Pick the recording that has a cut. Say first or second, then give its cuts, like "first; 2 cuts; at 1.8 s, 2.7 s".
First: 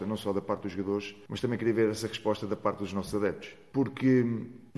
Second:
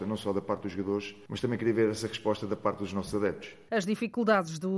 second; 1 cut; at 3.7 s